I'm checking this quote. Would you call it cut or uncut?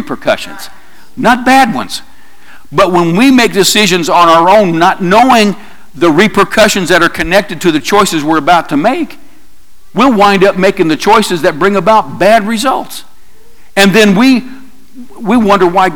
uncut